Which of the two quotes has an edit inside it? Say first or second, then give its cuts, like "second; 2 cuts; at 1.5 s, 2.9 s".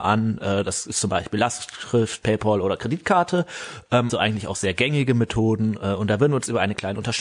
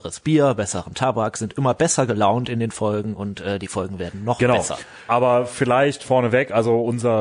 first; 1 cut; at 4.1 s